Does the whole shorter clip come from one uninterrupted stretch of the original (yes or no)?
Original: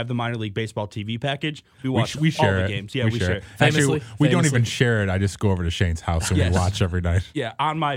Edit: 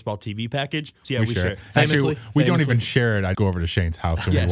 no